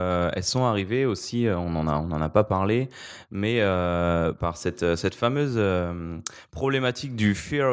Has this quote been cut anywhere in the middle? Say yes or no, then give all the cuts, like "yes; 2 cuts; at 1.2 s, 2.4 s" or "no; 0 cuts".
yes; 1 cut; at 4.4 s